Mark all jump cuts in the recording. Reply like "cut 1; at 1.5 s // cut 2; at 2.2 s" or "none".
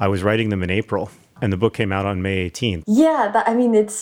cut 1; at 1.4 s // cut 2; at 2.8 s

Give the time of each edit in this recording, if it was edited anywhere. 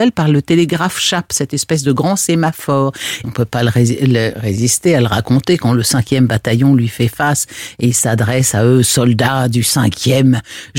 cut 1; at 3.2 s

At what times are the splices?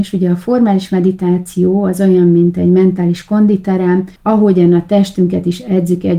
cut 1; at 4.2 s

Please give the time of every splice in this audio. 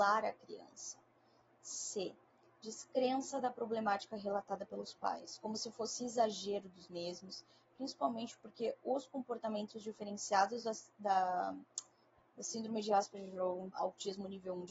cut 1; at 13.7 s

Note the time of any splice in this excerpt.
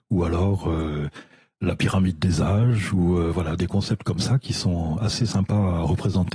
none

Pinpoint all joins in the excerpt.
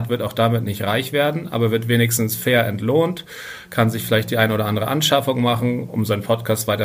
none

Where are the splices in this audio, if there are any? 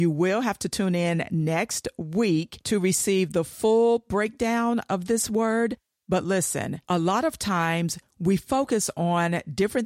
none

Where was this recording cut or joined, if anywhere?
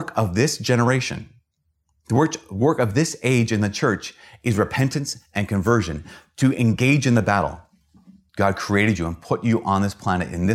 cut 1; at 8.3 s

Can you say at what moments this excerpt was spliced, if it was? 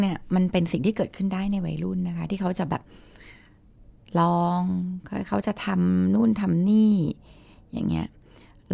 none

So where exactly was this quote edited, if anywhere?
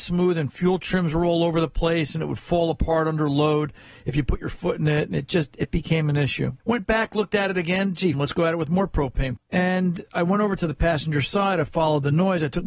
cut 1; at 6.6 s // cut 2; at 8.1 s // cut 3; at 9.4 s

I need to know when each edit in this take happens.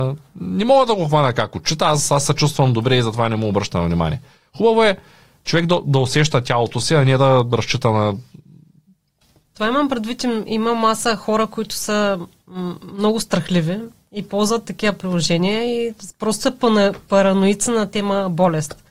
none

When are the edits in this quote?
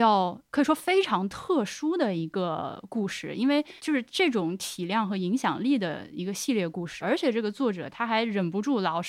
cut 1; at 3.8 s // cut 2; at 7.0 s

